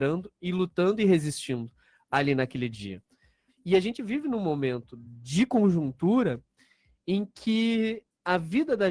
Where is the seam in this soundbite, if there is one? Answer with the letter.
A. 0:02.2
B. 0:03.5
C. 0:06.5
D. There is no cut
B